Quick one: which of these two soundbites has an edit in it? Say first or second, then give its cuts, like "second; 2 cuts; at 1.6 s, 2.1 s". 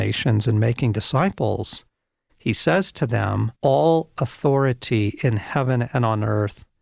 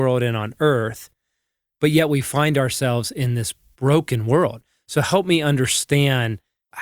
first; 1 cut; at 3.6 s